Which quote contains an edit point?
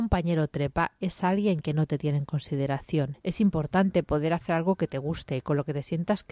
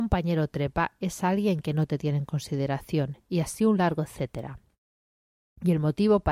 first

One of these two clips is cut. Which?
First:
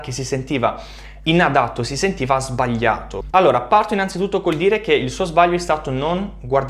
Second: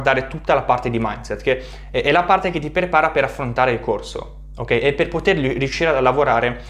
first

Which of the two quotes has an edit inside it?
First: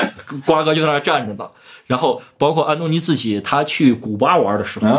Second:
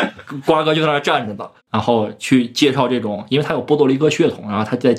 second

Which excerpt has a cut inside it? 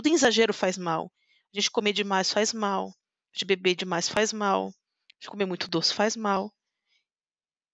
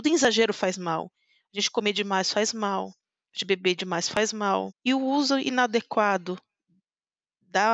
second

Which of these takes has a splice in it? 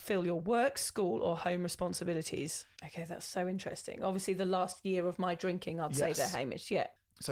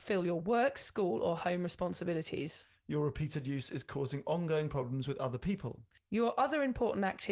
first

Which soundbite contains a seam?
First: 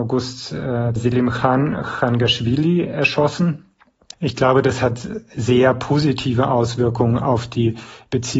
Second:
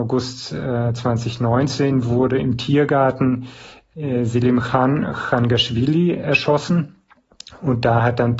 first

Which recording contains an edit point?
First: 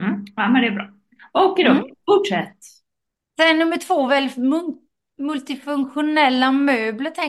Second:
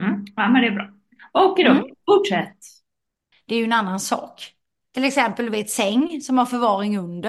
second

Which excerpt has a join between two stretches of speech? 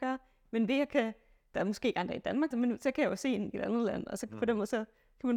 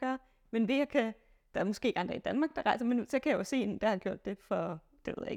first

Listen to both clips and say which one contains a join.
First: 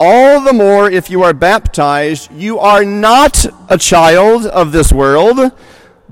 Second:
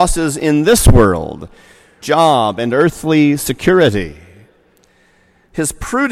second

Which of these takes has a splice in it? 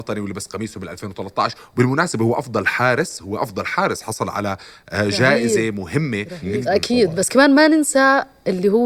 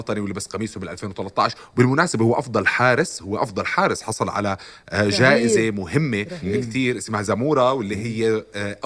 first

